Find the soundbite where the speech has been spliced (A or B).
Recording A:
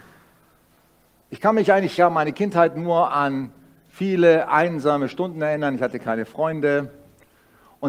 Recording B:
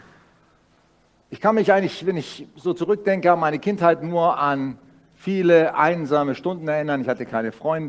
A